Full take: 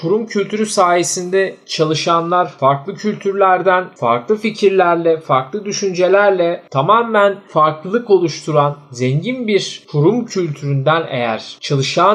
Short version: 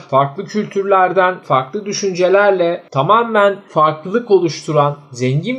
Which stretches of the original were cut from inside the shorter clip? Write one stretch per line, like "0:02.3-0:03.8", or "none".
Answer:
0:03.9-0:05.2